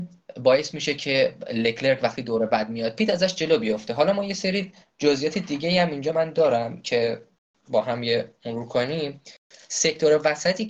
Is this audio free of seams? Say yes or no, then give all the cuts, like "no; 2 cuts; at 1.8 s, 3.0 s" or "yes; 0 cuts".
yes; 0 cuts